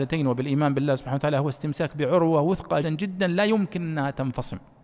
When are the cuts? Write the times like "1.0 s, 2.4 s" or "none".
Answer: 2.8 s